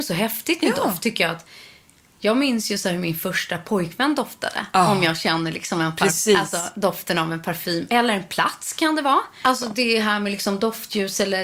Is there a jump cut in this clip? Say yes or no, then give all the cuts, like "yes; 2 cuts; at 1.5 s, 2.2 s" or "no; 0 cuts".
yes; 1 cut; at 9.4 s